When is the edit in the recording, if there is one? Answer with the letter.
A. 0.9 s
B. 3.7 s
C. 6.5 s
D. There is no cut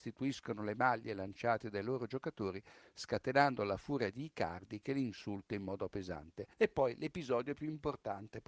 C